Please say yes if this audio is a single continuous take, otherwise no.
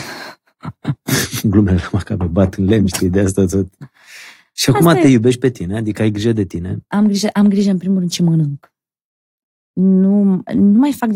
yes